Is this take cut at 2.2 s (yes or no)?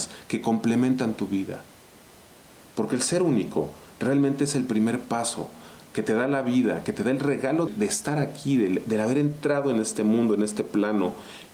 no